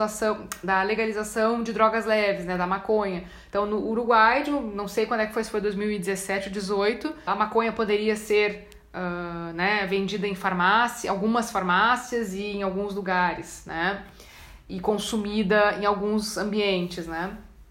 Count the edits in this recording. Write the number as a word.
one